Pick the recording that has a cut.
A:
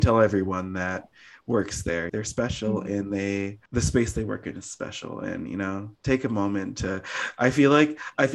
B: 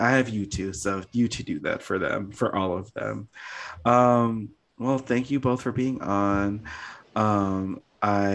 A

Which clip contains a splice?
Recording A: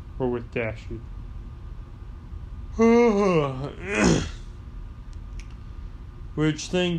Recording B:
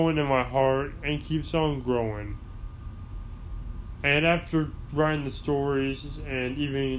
A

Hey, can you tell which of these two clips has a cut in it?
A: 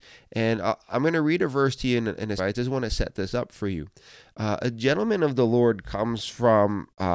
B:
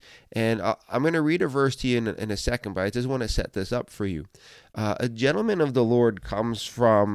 A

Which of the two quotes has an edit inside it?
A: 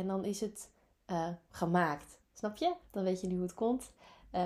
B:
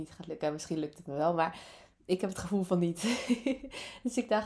A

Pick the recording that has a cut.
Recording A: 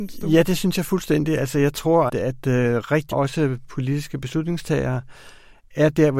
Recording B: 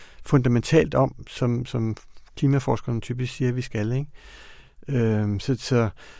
A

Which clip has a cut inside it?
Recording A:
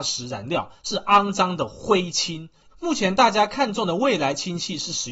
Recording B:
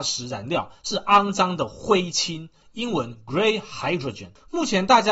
A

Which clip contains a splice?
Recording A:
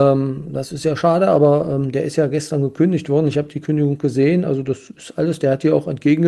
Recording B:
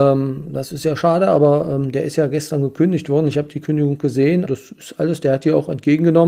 B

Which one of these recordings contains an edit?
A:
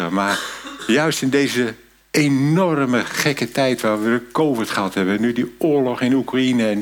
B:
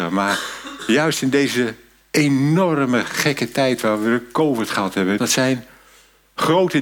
B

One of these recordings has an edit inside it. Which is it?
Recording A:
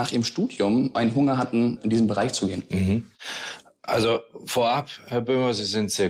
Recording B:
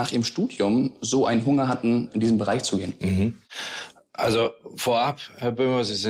A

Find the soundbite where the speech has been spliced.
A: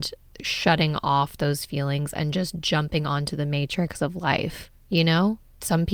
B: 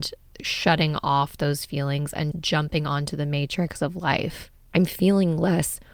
B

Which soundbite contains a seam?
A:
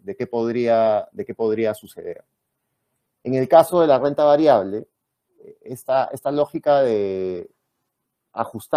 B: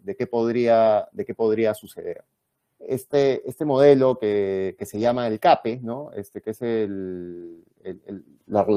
B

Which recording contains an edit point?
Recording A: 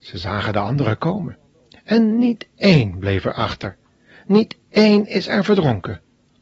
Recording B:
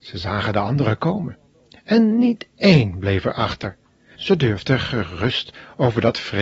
B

